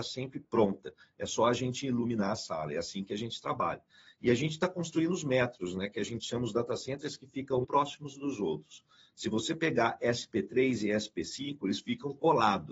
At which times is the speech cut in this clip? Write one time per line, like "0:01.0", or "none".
0:07.6